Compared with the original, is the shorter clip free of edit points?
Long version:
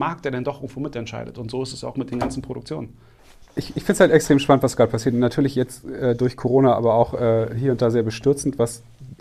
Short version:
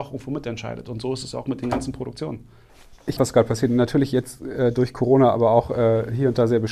no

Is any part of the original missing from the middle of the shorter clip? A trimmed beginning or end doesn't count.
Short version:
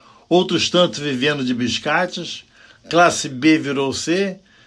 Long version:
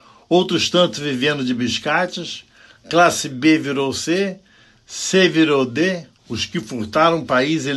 no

